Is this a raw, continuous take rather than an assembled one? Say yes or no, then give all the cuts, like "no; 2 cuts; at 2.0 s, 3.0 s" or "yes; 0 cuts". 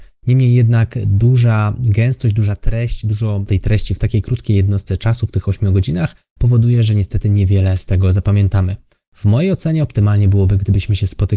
yes; 0 cuts